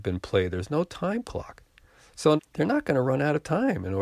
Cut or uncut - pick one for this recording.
cut